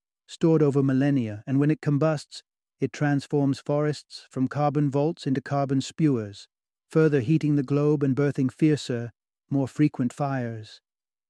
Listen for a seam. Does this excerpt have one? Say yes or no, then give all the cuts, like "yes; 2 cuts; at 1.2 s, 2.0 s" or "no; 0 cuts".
no; 0 cuts